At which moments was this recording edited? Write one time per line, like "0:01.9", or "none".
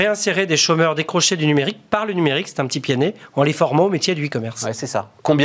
none